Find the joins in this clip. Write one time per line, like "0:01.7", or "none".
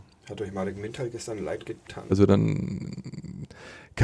0:02.1